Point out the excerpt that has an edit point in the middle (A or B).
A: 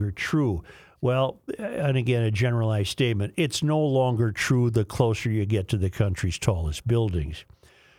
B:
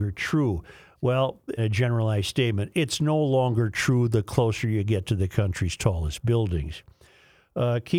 B